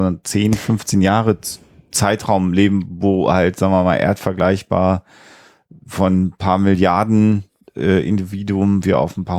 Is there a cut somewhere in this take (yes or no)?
no